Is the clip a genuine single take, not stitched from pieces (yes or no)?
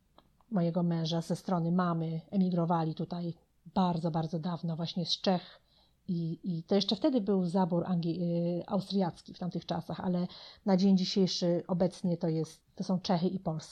yes